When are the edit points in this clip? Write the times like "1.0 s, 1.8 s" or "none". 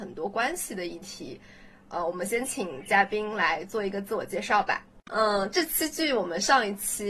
5.1 s